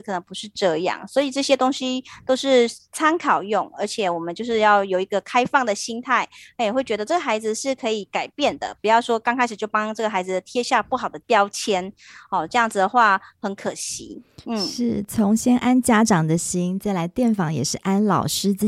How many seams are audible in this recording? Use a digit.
0